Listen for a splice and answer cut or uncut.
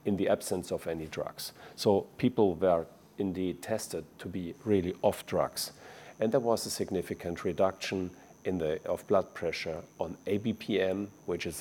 cut